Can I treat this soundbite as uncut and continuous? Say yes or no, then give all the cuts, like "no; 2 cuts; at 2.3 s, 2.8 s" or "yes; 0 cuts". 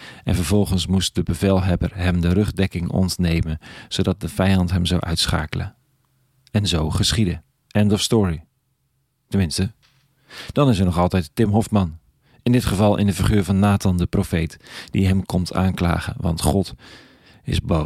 yes; 0 cuts